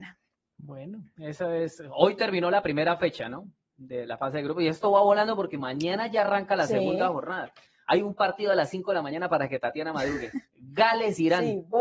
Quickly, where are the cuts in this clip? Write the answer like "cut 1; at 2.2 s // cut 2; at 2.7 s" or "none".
none